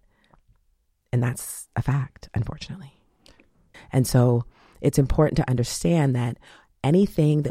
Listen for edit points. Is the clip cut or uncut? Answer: cut